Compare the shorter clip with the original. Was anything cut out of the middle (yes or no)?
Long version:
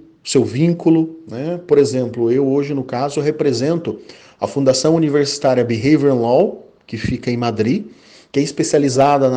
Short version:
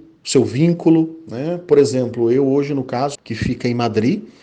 yes